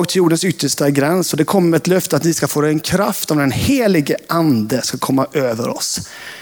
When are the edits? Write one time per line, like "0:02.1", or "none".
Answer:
none